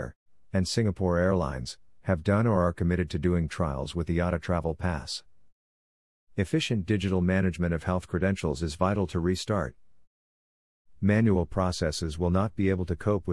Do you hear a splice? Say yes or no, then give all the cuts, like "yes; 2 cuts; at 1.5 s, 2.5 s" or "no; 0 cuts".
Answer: no; 0 cuts